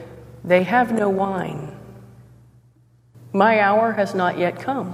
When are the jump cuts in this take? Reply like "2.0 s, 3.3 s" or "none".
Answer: 3.1 s